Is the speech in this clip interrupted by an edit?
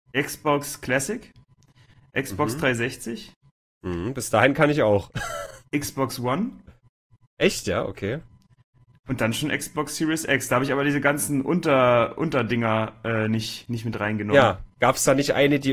no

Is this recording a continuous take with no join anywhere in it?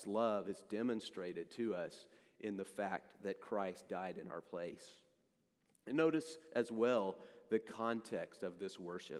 yes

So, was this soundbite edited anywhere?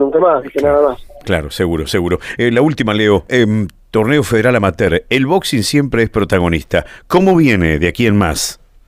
no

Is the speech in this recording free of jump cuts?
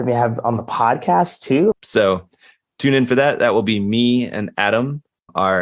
no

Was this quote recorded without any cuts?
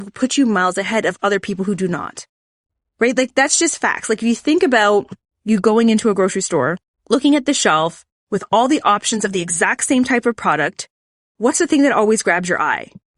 yes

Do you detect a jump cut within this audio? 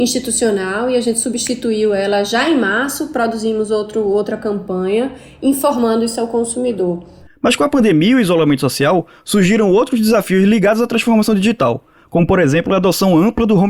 no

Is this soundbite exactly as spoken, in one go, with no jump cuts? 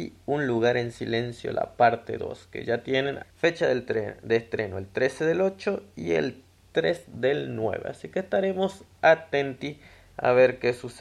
no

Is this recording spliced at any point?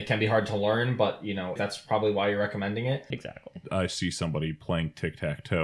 yes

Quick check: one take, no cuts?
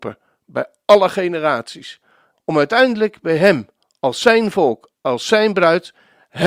no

